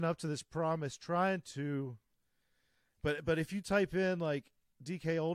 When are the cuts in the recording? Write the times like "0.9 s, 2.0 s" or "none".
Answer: none